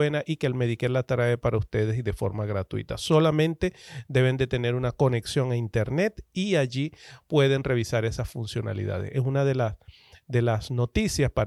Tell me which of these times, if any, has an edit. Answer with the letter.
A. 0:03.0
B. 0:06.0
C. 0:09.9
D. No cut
D